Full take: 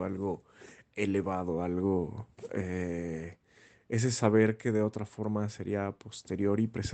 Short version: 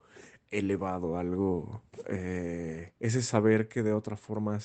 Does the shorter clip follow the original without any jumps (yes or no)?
no